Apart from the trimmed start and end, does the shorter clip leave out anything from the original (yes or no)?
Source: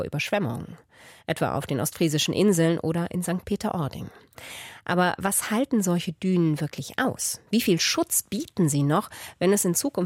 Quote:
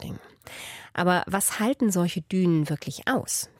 no